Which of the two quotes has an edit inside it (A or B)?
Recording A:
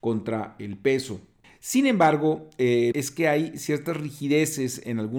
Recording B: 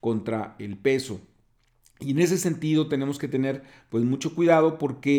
A